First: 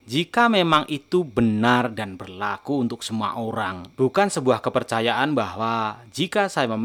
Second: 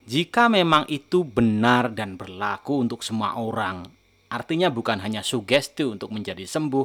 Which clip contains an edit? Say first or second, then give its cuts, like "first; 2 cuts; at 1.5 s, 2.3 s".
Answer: first; 1 cut; at 3.9 s